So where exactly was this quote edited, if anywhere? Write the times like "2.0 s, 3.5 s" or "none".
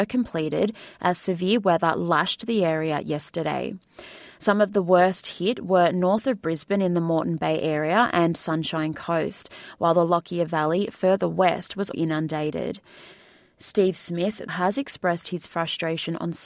11.9 s, 14.5 s